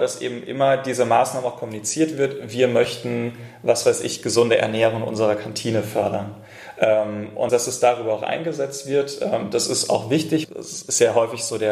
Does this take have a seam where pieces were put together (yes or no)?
yes